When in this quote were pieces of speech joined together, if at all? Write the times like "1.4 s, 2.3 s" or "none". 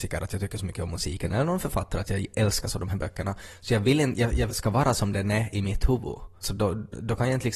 4.5 s, 6.4 s